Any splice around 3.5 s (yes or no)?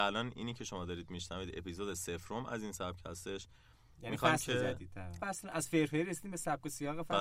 no